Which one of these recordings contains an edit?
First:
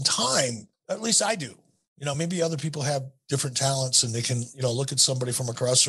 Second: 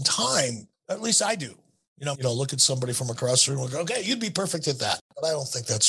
second; 1 cut; at 2.1 s

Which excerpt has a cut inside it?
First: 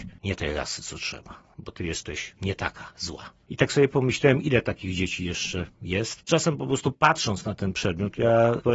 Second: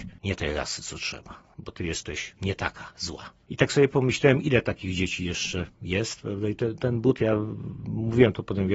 first; 1 cut; at 6.2 s

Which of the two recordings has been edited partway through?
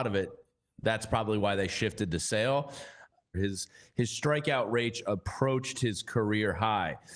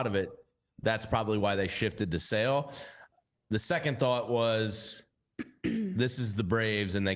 first; 1 cut; at 3.3 s

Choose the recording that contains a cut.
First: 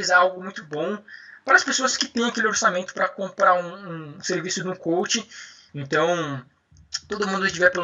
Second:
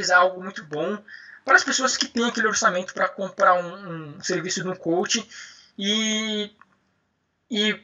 first; 1 cut; at 5.7 s

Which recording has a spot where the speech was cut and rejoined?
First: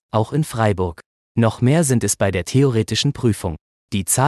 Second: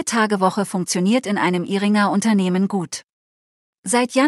first; 1 cut; at 1.3 s

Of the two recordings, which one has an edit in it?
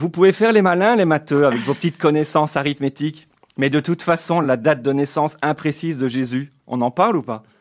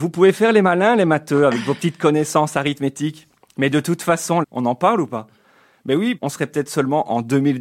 second; 2 cuts; at 4.4 s, 6.2 s

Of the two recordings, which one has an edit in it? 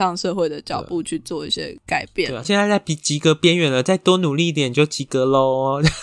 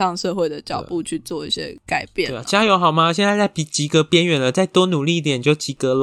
first; 1 cut; at 2.4 s

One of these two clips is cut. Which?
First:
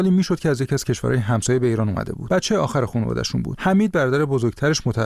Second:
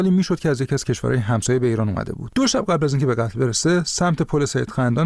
second; 1 cut; at 2.3 s

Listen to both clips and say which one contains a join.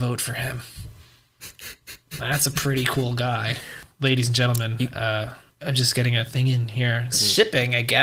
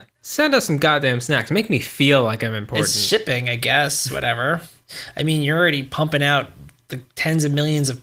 first; 1 cut; at 7.1 s

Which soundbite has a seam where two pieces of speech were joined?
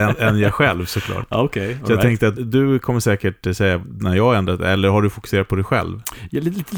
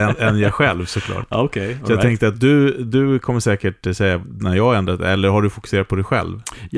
first; 1 cut; at 2.4 s

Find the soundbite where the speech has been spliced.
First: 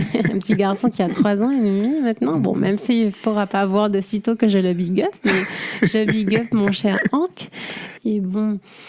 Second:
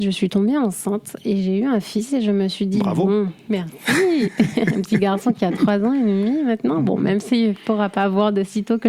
first; 1 cut; at 8.0 s

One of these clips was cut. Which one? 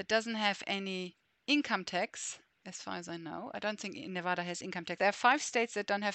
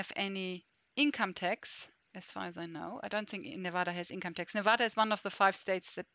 first; 1 cut; at 5.0 s

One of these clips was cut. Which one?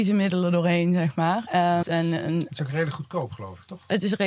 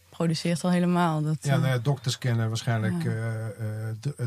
first; 1 cut; at 1.8 s

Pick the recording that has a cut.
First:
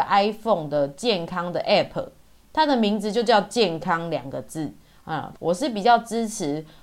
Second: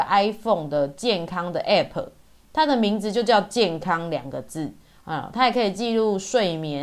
first; 1 cut; at 5.3 s

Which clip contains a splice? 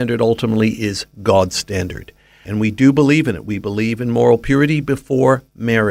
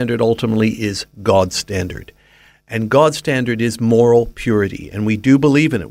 first; 1 cut; at 2.4 s

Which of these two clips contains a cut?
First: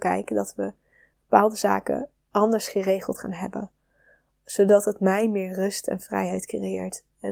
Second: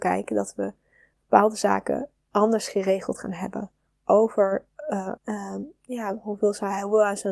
second; 2 cuts; at 3.9 s, 5.2 s

